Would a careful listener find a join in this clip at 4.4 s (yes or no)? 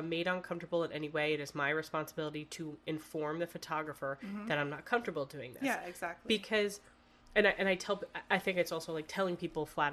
no